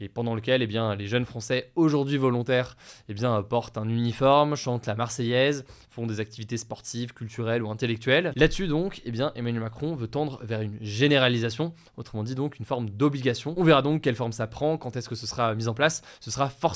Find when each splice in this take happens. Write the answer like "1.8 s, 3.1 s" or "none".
8.3 s